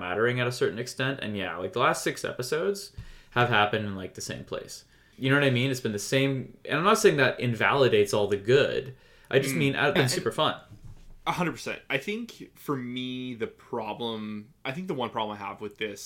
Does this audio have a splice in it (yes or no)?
yes